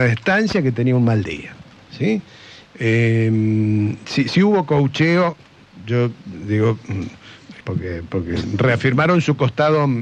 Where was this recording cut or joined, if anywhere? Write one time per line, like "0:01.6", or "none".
0:02.7
0:07.6